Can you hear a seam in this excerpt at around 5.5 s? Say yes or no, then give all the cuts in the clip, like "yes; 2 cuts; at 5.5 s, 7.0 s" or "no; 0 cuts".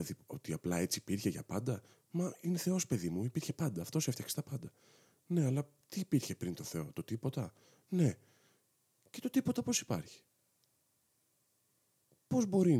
no; 0 cuts